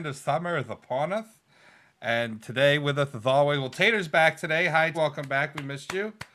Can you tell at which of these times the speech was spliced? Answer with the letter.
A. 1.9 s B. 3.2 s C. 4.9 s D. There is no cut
C